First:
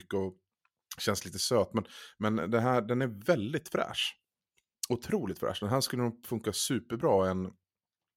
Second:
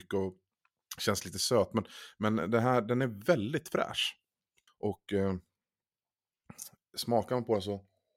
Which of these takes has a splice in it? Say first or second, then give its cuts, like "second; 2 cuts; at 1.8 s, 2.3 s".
second; 1 cut; at 4.7 s